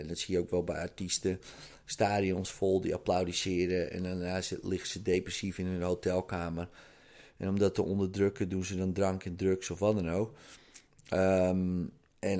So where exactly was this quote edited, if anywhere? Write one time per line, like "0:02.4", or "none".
none